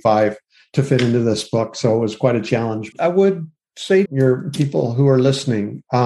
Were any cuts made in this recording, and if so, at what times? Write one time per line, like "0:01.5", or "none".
0:02.9
0:04.1